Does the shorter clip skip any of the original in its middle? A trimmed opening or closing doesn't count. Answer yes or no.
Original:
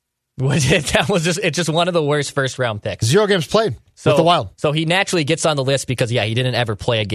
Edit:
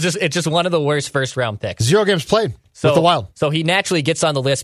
no